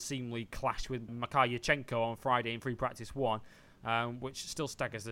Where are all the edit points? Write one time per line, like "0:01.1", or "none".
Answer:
0:01.1